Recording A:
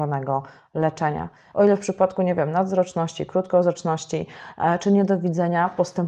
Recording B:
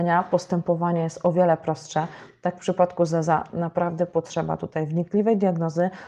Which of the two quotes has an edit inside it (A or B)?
A